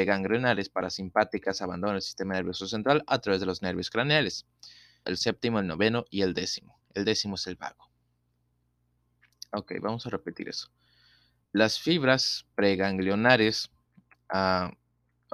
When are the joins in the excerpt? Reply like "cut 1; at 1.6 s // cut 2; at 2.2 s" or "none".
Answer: cut 1; at 5.0 s